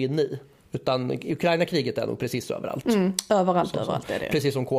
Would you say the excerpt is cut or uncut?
uncut